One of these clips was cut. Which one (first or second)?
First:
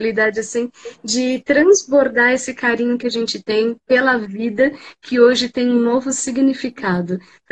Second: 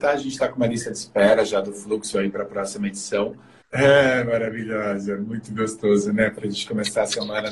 second